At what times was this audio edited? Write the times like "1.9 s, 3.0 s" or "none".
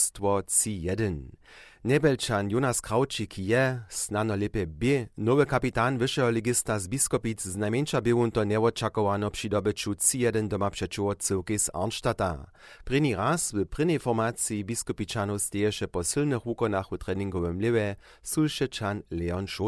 12.8 s